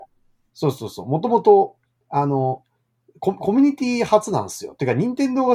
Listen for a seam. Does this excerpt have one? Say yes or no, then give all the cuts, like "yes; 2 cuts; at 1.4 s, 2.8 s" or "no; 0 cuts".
no; 0 cuts